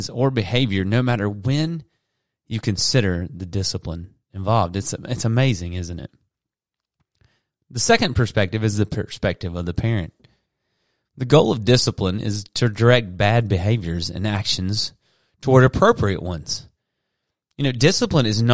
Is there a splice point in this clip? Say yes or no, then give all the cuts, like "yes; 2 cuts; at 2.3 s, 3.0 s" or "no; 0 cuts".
no; 0 cuts